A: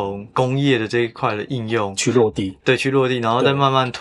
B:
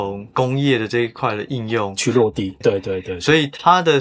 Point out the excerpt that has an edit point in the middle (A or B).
B